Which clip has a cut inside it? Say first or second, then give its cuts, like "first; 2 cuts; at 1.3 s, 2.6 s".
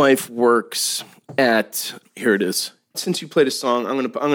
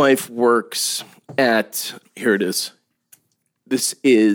first; 1 cut; at 2.9 s